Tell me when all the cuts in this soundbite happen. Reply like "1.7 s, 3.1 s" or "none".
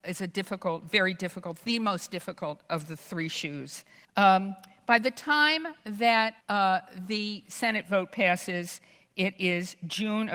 4.0 s, 6.4 s